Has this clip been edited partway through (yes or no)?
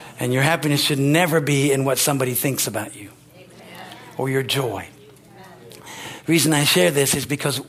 no